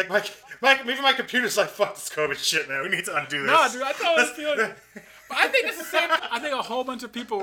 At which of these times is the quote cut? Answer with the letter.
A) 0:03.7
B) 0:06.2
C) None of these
B